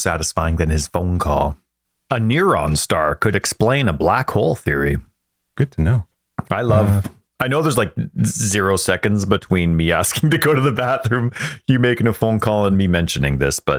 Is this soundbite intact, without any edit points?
no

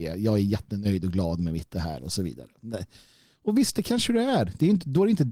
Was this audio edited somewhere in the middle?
no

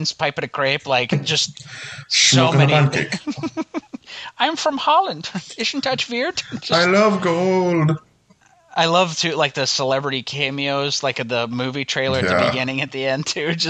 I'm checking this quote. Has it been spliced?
no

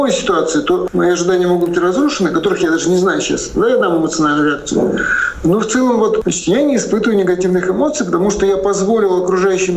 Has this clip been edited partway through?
no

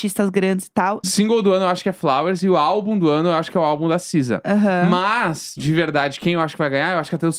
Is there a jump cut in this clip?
yes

